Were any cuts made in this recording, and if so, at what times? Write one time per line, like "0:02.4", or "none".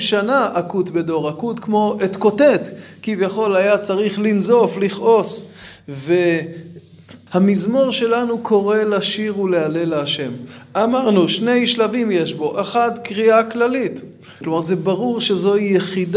0:07.3
0:14.4